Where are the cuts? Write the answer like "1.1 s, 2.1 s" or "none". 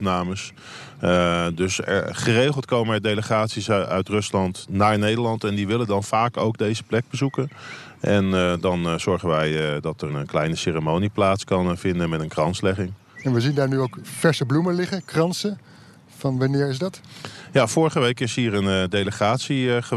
10.1 s, 13.2 s